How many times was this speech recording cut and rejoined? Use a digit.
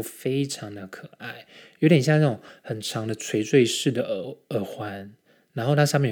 0